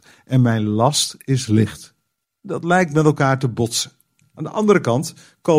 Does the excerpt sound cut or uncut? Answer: cut